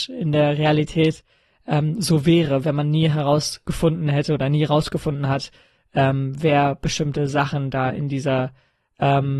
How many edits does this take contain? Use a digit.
0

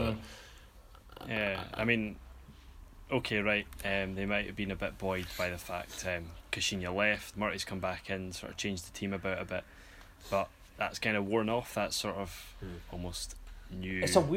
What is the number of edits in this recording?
1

